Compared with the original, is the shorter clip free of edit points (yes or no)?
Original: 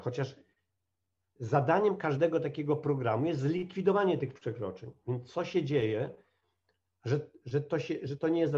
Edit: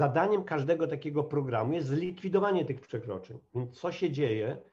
yes